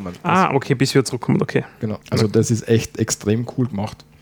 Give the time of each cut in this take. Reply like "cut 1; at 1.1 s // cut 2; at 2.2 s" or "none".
cut 1; at 2.0 s